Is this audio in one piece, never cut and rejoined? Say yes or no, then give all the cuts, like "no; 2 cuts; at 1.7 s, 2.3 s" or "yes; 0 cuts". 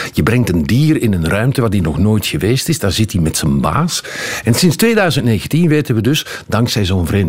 no; 1 cut; at 4.4 s